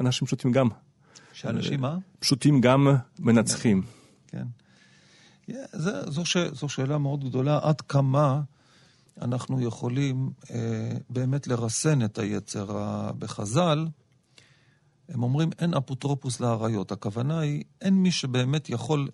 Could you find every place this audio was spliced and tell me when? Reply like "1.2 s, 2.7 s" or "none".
none